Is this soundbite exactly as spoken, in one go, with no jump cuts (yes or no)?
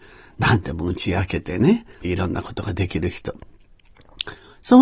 no